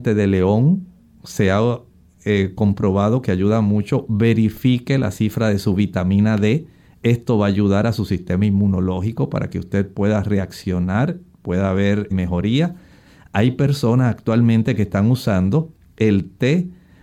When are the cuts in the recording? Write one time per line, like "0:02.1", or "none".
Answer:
0:12.1